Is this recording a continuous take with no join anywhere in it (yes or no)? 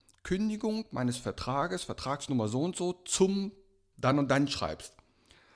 yes